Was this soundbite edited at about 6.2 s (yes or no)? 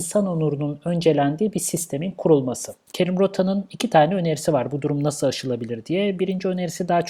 no